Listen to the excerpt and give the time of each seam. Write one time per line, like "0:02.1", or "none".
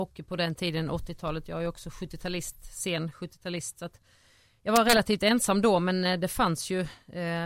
none